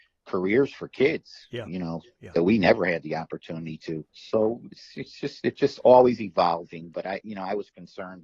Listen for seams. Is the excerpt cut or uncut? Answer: cut